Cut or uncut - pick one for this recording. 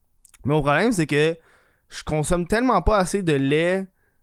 uncut